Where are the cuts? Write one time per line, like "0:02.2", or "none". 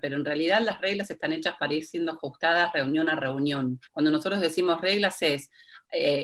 0:03.9